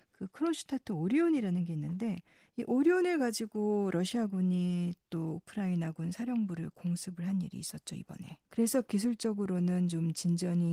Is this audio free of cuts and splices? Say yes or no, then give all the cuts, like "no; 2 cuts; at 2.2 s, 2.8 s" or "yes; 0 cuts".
no; 1 cut; at 8.4 s